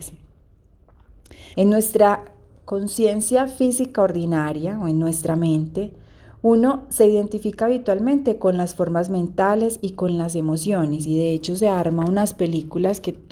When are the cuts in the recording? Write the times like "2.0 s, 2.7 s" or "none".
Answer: 1.5 s